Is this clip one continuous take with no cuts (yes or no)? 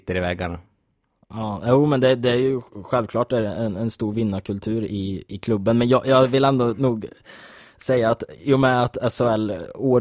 yes